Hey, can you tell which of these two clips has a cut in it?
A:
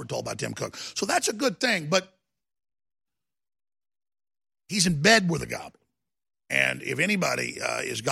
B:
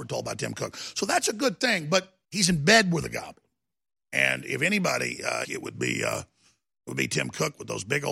B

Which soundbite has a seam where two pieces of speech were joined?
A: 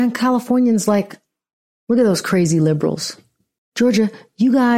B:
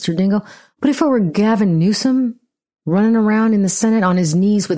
A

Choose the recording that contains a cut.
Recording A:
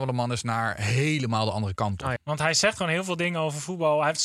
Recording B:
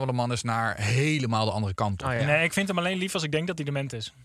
A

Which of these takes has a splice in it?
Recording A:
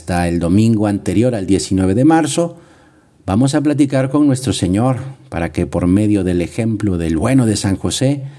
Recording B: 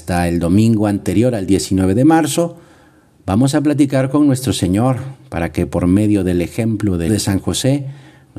B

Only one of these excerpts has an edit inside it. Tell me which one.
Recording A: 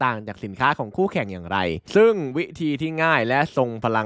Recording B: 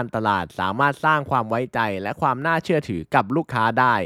A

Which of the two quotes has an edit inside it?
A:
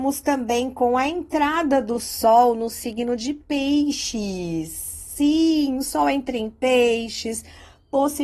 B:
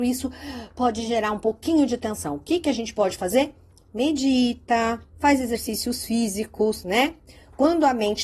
B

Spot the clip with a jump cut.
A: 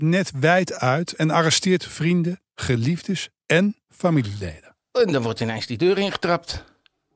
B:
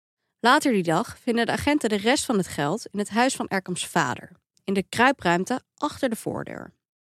A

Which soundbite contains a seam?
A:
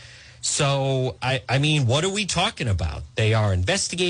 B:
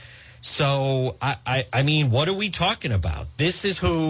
A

